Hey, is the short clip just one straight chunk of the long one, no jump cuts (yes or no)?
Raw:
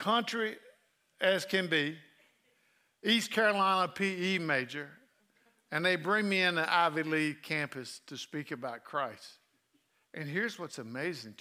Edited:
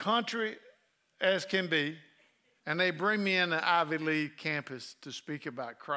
no